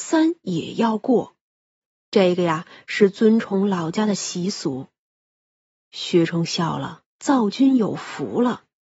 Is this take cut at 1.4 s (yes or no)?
no